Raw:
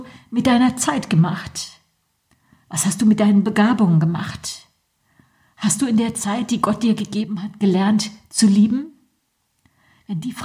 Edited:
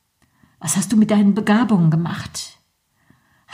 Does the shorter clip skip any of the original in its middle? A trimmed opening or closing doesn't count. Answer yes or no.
no